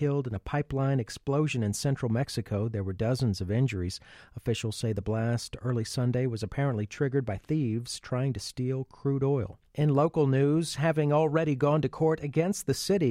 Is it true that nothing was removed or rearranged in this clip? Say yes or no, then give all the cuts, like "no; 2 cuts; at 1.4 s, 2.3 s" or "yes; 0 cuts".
no; 1 cut; at 9.7 s